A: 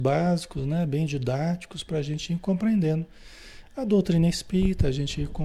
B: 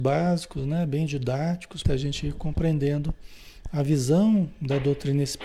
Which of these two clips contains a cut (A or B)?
B